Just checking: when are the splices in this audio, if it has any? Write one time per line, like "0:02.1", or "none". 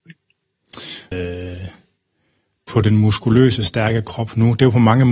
0:01.1